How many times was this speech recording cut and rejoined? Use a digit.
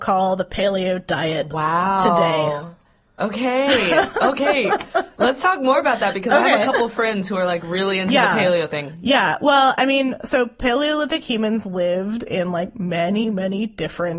1